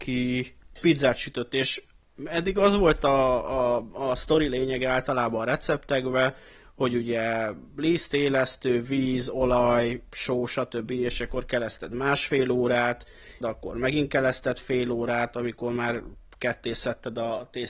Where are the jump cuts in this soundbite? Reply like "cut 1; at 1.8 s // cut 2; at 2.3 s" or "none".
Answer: cut 1; at 10.9 s // cut 2; at 13.4 s